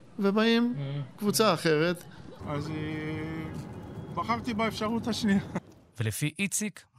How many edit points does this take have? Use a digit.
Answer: 1